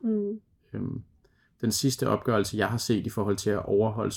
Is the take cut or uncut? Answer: uncut